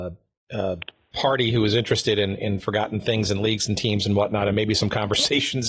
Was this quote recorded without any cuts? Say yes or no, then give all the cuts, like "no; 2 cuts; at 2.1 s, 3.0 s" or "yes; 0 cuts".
yes; 0 cuts